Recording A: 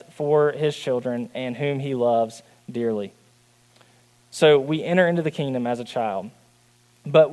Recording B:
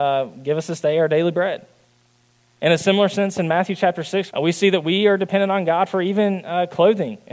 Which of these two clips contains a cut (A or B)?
B